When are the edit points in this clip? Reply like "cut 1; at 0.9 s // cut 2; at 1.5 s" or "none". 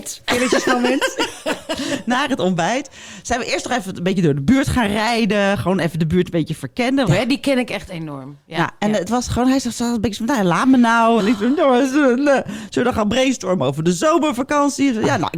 cut 1; at 7.1 s // cut 2; at 11.2 s